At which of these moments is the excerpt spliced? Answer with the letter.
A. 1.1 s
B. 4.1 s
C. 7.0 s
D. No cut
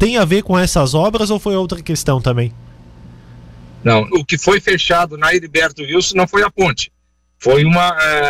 B